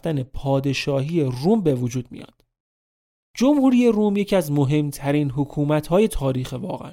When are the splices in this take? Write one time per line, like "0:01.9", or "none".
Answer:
0:03.2